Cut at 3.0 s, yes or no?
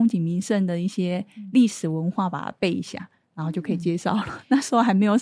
no